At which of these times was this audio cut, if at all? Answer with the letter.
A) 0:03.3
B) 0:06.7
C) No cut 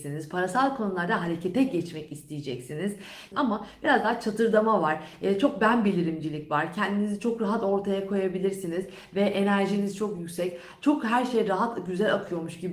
A